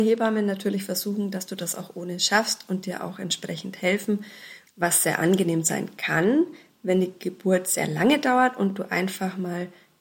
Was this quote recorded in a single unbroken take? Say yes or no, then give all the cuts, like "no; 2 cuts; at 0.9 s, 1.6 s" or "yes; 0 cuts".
no; 1 cut; at 4.7 s